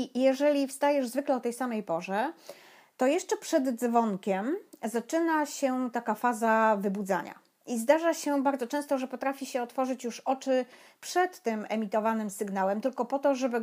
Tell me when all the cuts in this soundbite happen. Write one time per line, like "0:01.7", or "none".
none